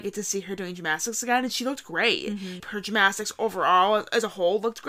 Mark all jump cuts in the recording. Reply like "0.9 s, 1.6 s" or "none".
2.6 s